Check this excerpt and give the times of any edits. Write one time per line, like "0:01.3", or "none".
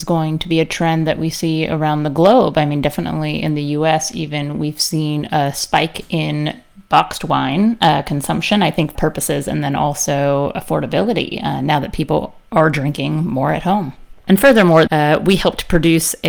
0:08.9
0:14.9